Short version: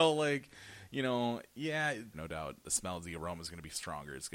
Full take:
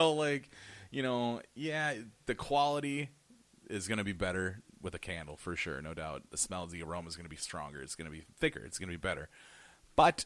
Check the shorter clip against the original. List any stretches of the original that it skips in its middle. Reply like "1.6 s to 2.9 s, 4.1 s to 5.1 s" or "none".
2.1 s to 5.8 s